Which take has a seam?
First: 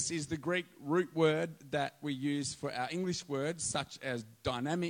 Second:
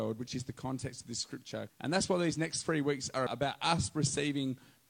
second; 2 cuts; at 1.7 s, 3.3 s

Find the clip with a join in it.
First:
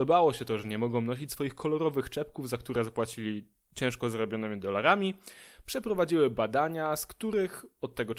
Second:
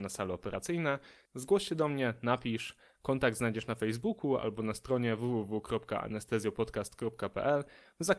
second; 1 cut; at 1.3 s

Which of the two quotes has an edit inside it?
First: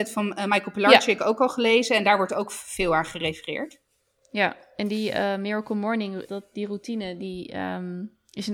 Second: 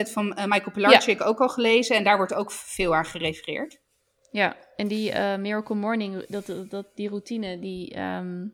first; 1 cut; at 6.3 s

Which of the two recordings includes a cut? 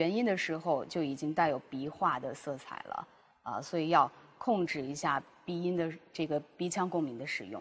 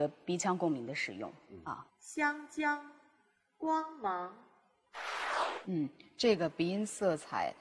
second; 1 cut; at 1.9 s

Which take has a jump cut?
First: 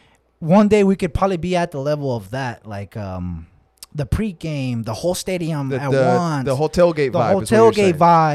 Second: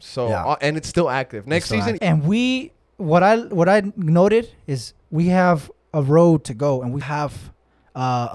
second; 2 cuts; at 2.0 s, 7.0 s

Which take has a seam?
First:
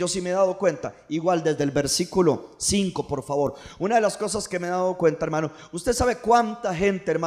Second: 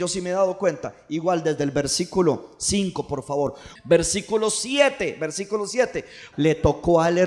second; 2 cuts; at 3.8 s, 6.3 s

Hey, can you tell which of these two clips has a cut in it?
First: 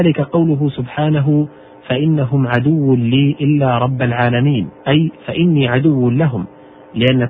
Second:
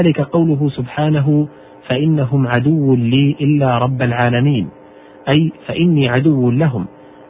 first; 1 cut; at 4.8 s

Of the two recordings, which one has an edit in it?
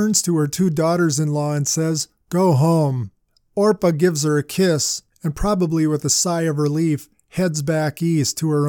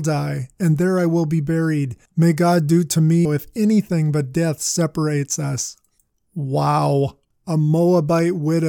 second; 1 cut; at 3.2 s

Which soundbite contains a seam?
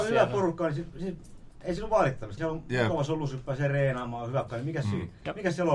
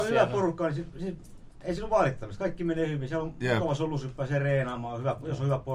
first; 2 cuts; at 2.4 s, 4.5 s

